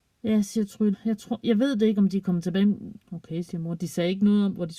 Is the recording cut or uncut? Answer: cut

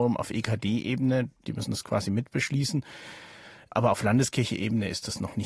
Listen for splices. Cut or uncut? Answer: cut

